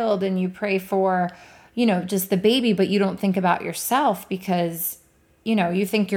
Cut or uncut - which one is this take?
uncut